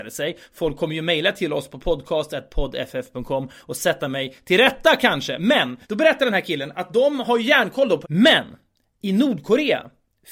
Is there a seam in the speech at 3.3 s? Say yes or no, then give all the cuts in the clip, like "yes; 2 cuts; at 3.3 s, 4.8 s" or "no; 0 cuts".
no; 2 cuts; at 5.8 s, 8.0 s